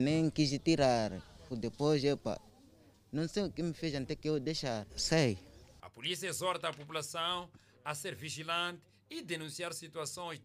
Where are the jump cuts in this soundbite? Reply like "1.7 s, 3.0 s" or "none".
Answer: 1.5 s, 4.9 s